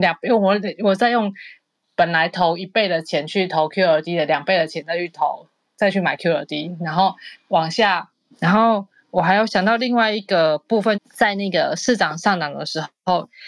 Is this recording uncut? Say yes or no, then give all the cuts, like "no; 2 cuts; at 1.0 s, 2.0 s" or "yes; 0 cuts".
no; 2 cuts; at 8.3 s, 10.9 s